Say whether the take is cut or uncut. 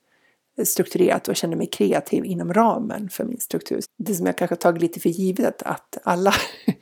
cut